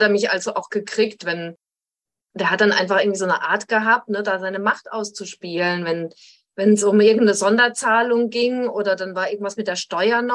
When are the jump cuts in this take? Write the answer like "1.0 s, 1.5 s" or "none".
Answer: none

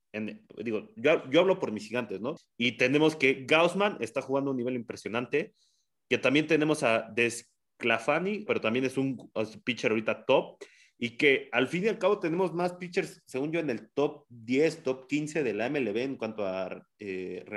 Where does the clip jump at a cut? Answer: 2.4 s, 8.5 s

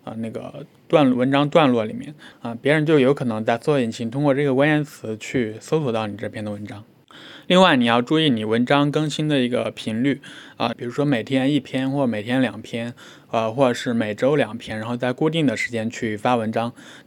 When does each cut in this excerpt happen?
2.3 s, 10.7 s

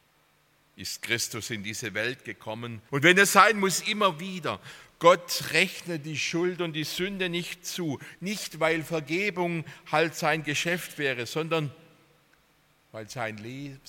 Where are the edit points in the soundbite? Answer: 2.9 s, 8.2 s

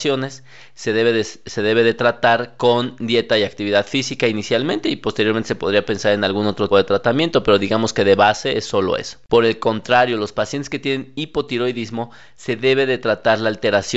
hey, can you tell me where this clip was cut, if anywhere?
6.7 s

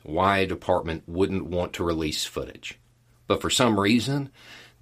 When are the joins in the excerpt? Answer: 3.1 s

